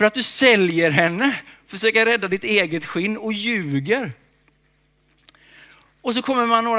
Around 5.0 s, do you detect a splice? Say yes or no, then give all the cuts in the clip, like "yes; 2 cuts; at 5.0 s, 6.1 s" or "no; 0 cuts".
no; 0 cuts